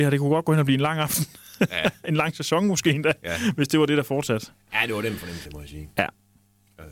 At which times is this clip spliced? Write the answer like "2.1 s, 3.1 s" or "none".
5.4 s